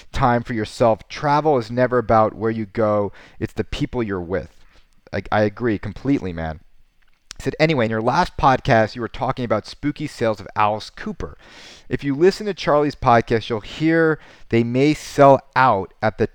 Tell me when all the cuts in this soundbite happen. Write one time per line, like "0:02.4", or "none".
none